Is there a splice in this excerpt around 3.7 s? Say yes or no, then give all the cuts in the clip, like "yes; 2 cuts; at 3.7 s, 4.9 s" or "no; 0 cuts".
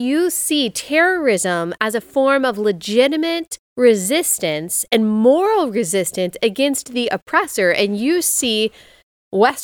yes; 1 cut; at 3.7 s